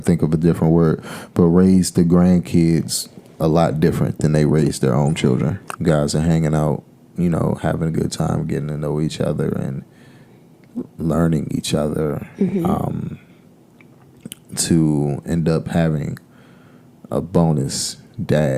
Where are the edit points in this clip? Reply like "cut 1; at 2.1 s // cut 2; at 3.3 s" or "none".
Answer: cut 1; at 5.8 s